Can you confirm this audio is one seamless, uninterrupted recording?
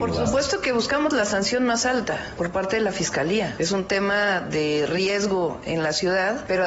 no; 1 cut; at 3.6 s

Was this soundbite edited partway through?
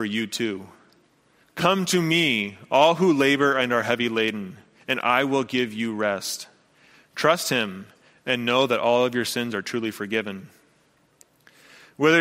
yes; 2 cuts; at 1.4 s, 6.9 s

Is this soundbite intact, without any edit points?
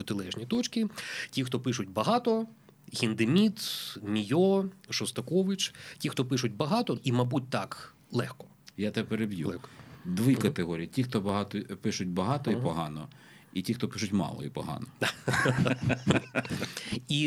no; 1 cut; at 7.0 s

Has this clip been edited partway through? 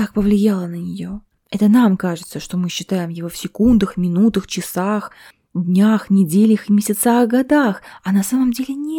yes; 1 cut; at 1.3 s

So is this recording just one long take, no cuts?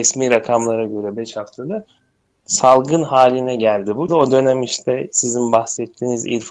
no; 1 cut; at 4.1 s

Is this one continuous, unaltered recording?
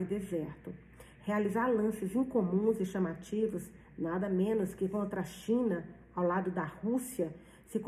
yes; 0 cuts

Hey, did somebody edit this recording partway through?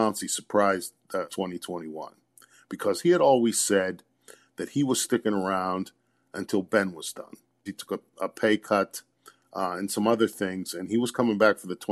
yes; 2 cuts; at 1.3 s, 7.7 s

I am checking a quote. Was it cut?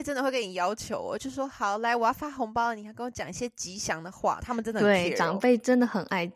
no; 0 cuts

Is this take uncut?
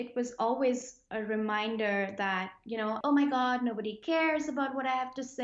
no; 1 cut; at 3.0 s

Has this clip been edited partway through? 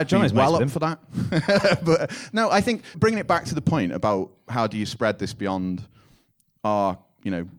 yes; 1 cut; at 2.9 s

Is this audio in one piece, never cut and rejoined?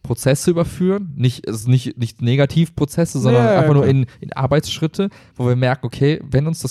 yes; 0 cuts

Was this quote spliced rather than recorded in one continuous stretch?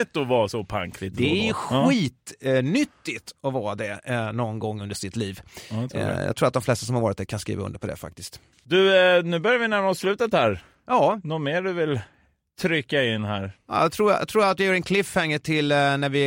no; 0 cuts

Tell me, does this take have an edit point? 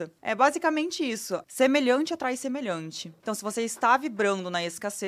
yes; 2 cuts; at 1.4 s, 3.2 s

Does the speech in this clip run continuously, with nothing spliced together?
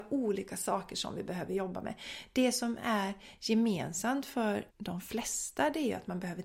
no; 1 cut; at 4.7 s

